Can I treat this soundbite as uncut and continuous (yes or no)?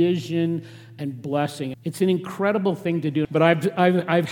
no